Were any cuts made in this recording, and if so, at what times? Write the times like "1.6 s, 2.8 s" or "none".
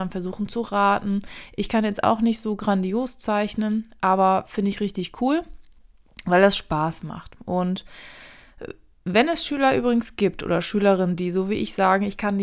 none